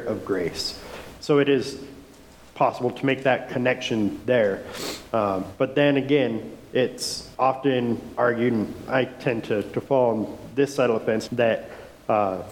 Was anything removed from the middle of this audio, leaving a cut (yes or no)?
yes